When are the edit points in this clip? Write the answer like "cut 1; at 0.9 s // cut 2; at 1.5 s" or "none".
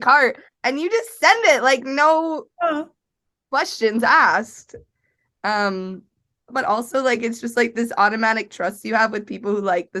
cut 1; at 6.5 s